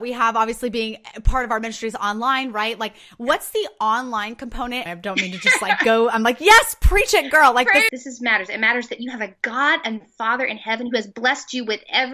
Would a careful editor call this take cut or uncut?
cut